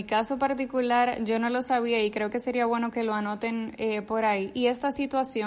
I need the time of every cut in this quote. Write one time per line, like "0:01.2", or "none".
none